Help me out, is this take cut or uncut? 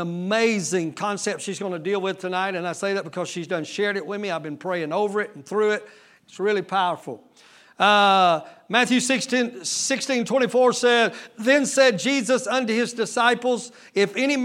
uncut